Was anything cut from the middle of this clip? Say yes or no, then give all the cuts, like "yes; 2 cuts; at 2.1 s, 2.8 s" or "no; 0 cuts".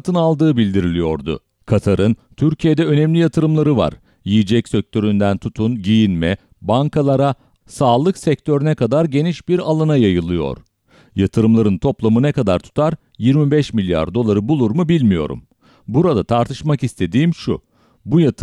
yes; 1 cut; at 7.6 s